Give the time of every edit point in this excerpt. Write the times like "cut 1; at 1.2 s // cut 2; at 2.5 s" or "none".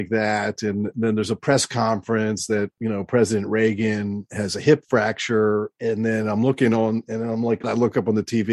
cut 1; at 7.6 s